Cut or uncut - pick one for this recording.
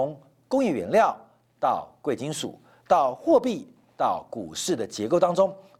uncut